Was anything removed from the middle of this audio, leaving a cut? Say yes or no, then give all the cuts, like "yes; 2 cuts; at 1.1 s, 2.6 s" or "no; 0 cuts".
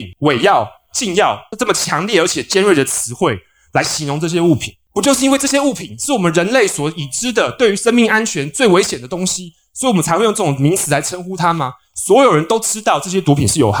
no; 0 cuts